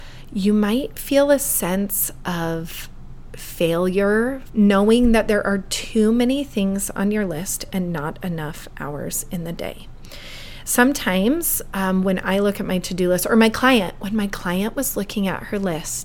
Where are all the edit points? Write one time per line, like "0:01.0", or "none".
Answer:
0:04.5